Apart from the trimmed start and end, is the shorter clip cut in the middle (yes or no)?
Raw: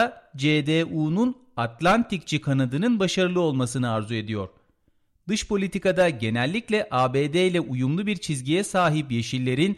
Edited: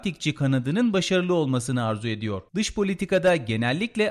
yes